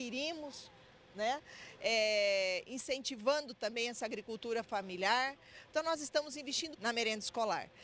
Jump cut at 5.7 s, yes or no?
yes